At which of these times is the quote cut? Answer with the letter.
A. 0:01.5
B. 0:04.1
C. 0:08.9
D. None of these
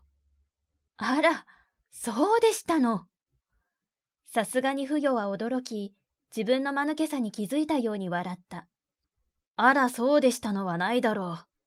D